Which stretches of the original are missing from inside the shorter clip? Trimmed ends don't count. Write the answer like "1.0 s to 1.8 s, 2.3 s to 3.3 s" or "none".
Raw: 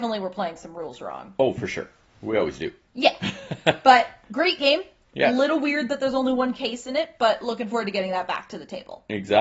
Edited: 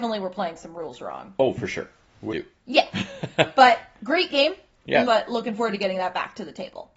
2.3 s to 2.6 s, 5.3 s to 7.2 s